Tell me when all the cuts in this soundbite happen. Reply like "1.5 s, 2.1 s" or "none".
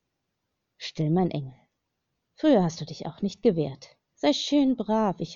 none

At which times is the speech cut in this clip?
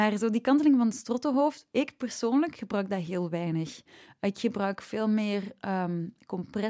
none

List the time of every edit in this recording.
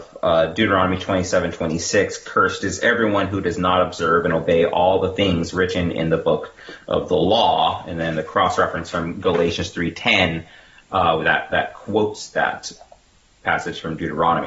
none

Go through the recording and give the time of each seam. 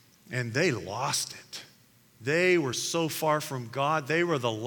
none

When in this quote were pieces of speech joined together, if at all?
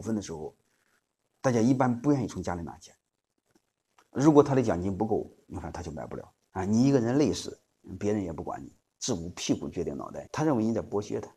6.5 s, 8.9 s, 10.3 s

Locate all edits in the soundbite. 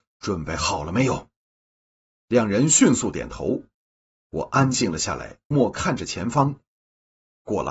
5.5 s

